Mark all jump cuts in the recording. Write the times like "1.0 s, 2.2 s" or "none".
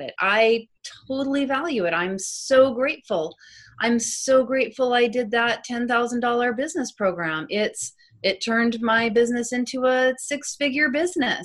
none